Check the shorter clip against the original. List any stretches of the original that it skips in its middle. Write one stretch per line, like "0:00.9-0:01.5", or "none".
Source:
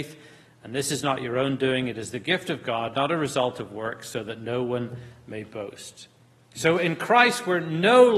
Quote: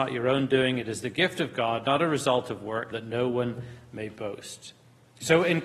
0:04.0-0:04.3